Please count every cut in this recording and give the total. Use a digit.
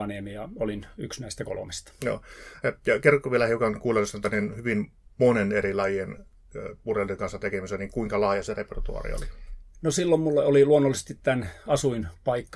0